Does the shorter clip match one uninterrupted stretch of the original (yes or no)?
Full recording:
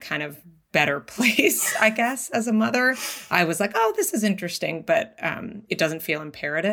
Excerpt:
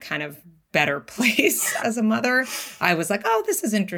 no